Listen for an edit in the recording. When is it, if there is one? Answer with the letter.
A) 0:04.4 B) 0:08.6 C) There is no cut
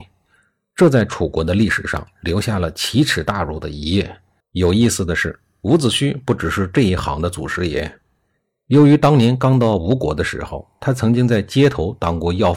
A